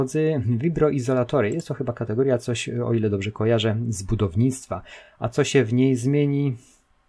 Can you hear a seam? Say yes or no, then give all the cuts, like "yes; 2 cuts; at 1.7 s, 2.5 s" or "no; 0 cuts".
no; 0 cuts